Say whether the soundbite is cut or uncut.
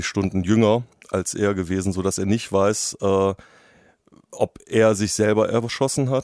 uncut